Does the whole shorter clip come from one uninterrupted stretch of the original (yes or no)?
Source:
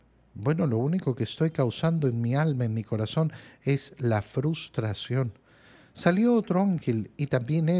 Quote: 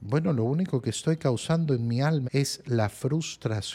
no